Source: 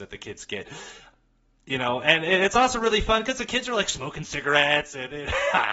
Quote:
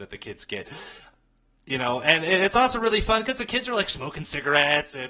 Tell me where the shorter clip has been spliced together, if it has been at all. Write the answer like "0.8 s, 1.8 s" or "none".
none

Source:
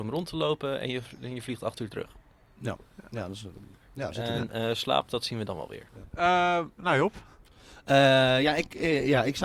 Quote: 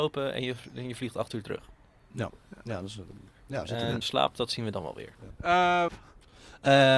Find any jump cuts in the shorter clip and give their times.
4.0 s, 5.9 s

